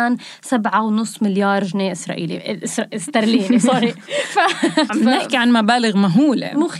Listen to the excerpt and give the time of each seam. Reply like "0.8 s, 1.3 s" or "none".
4.9 s